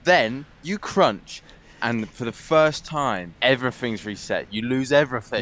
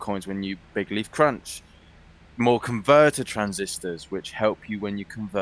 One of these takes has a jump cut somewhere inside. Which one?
first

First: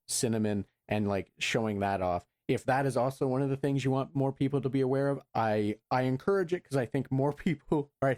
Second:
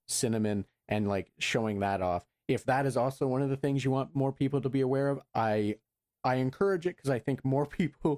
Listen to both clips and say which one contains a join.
first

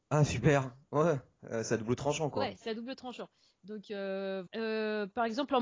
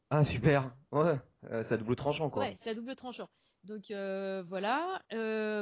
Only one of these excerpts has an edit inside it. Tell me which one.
first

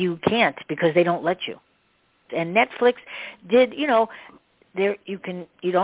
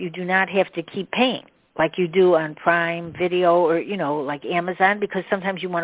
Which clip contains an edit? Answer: first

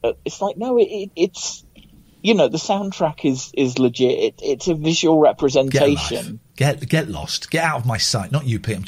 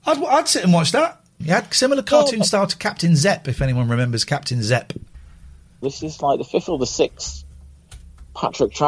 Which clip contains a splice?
second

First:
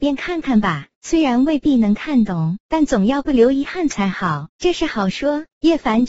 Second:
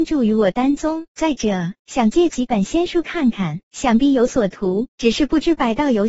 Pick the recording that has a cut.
second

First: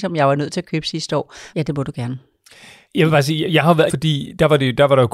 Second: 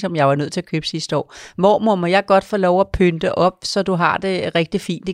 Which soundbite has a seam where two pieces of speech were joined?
first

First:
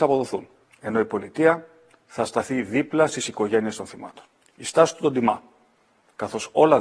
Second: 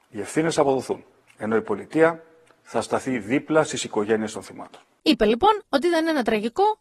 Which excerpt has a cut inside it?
first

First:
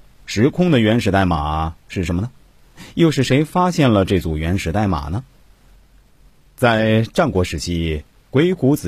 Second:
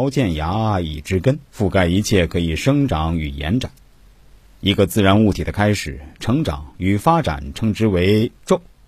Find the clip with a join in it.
second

